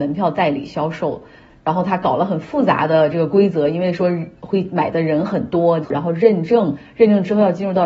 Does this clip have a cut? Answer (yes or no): yes